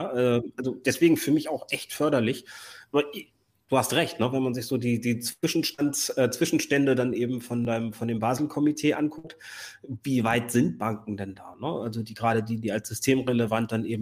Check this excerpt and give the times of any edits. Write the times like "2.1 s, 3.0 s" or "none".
none